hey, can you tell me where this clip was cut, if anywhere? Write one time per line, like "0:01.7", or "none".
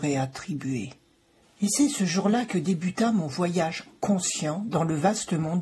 0:01.4